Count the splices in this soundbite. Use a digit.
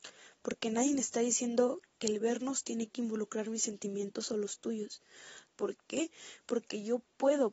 1